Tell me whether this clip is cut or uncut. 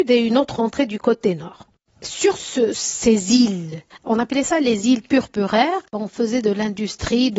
cut